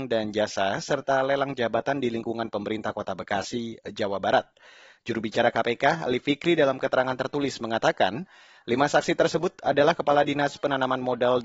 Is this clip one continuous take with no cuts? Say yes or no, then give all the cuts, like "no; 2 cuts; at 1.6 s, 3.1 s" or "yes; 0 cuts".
yes; 0 cuts